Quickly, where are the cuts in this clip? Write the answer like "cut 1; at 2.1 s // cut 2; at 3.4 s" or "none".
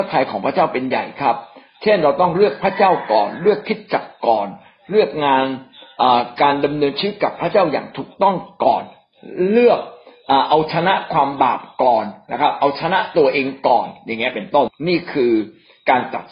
cut 1; at 14.7 s